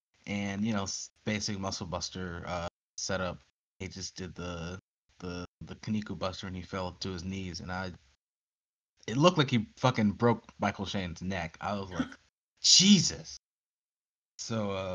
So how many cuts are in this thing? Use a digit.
1